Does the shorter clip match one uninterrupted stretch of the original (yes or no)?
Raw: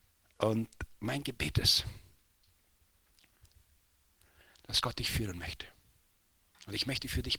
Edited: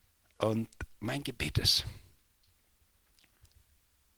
yes